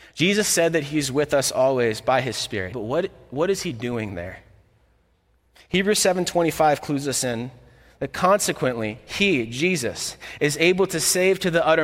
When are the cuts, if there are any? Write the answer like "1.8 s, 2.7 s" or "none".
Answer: 2.7 s